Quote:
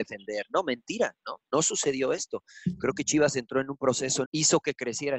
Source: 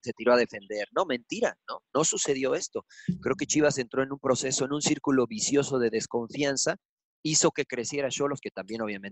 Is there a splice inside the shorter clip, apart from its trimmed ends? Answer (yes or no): yes